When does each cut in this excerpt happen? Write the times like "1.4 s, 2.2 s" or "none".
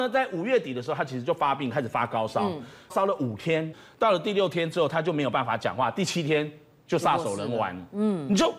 2.9 s

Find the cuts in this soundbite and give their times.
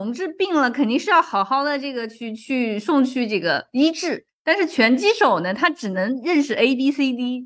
4.3 s

